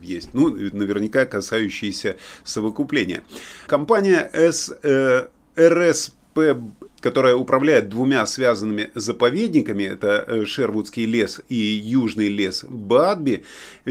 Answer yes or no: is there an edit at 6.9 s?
yes